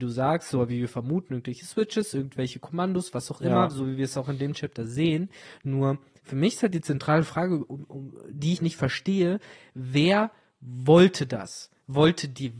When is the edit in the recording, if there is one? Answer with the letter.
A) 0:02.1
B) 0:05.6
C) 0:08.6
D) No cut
C